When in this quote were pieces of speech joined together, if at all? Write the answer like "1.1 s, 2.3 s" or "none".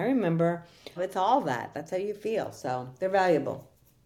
1.0 s